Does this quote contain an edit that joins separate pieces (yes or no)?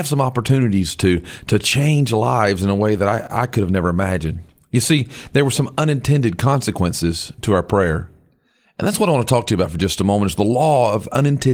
no